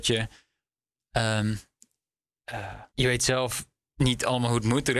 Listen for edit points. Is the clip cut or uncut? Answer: cut